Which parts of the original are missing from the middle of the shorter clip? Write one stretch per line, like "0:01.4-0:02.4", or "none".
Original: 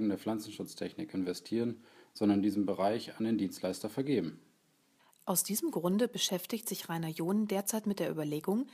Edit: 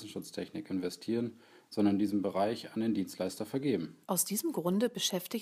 0:04.5-0:05.2